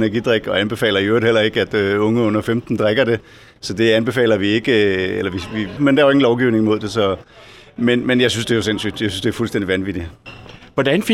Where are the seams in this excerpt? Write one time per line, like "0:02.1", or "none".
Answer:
0:05.8